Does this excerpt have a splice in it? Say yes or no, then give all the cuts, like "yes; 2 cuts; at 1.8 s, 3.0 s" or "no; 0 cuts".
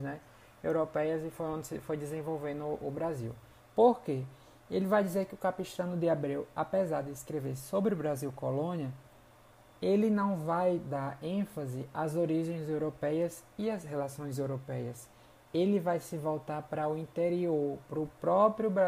yes; 1 cut; at 3.6 s